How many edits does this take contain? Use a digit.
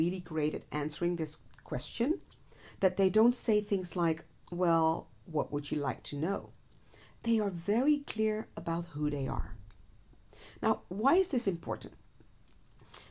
0